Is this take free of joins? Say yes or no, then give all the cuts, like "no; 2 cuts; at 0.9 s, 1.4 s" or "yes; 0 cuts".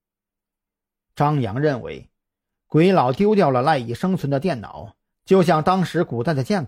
yes; 0 cuts